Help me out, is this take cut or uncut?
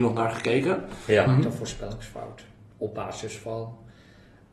cut